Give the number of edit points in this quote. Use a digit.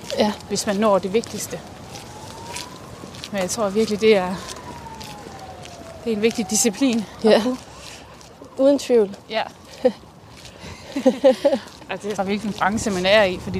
2